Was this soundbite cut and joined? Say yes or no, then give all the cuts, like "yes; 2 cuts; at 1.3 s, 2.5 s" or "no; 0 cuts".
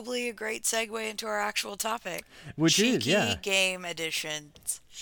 no; 0 cuts